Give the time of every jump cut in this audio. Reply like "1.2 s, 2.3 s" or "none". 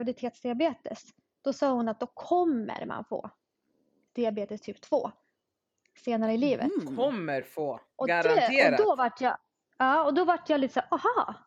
4.1 s